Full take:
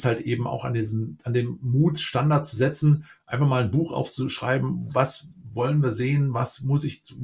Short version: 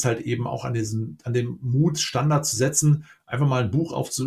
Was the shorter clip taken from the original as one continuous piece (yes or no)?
yes